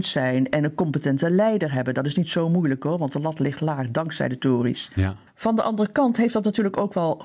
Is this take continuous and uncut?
no; 1 cut; at 5.3 s

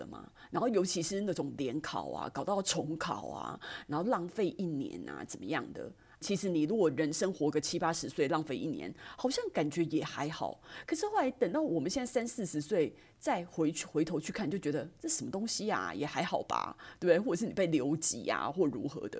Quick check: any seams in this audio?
yes; 2 cuts; at 6.2 s, 10.8 s

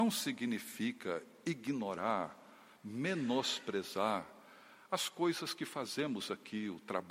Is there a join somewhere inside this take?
no; 0 cuts

